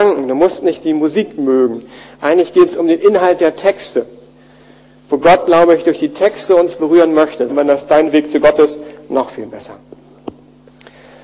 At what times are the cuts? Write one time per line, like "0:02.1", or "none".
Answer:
0:07.5